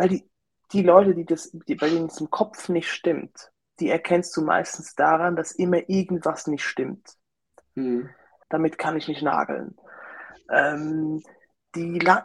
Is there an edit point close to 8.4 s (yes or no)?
yes